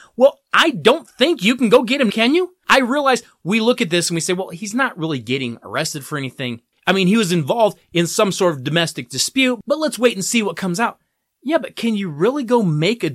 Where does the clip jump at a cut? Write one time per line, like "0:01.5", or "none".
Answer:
0:02.1